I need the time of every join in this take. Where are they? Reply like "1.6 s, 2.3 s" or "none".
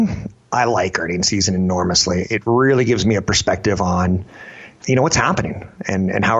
4.8 s